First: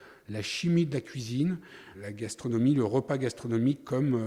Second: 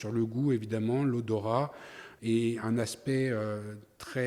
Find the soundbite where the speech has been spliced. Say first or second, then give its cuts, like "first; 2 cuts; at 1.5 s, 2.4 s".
first; 1 cut; at 1.9 s